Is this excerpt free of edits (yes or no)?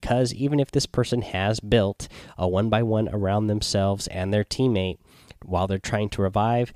yes